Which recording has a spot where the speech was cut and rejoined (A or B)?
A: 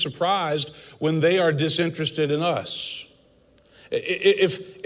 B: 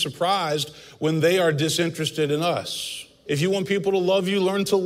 B